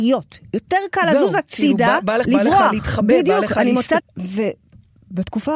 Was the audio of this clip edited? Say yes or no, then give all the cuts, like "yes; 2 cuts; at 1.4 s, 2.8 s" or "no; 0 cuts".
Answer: yes; 2 cuts; at 2.2 s, 4.0 s